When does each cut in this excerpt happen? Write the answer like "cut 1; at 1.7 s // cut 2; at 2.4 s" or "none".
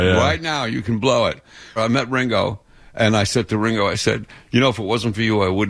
cut 1; at 1.8 s